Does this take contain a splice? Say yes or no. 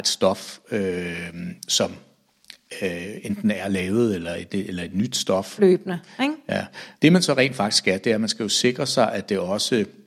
yes